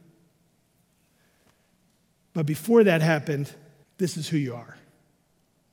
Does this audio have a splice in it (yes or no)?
yes